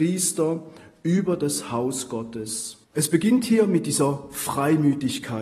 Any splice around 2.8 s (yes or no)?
yes